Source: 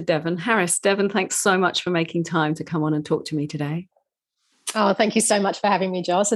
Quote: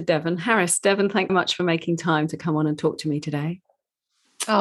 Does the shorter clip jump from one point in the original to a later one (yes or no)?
yes